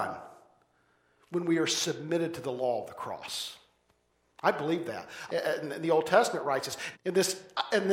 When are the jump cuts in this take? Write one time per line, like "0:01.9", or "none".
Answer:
0:05.3
0:06.9